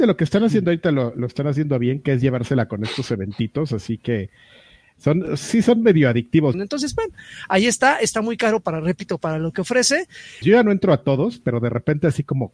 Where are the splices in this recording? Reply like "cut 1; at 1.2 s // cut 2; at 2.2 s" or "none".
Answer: cut 1; at 6.5 s // cut 2; at 10.4 s